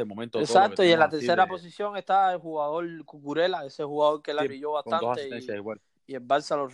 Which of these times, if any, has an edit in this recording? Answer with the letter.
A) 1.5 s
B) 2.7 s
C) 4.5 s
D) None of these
C